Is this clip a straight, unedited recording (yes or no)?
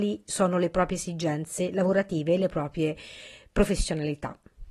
yes